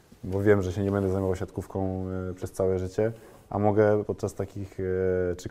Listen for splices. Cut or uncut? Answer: cut